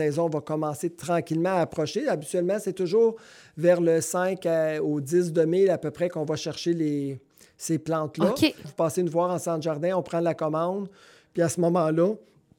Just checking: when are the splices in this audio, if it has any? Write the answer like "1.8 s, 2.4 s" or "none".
8.6 s